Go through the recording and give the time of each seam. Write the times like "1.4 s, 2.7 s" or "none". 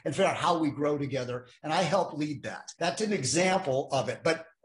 2.8 s